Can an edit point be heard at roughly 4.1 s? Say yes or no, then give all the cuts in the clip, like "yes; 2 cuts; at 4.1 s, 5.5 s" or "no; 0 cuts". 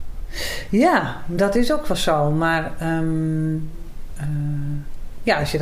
no; 0 cuts